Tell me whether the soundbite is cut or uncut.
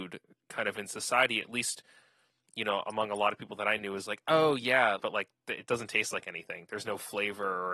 cut